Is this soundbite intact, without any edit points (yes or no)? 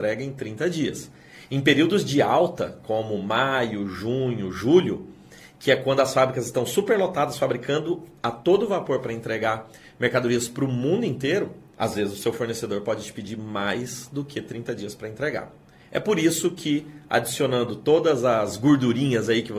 yes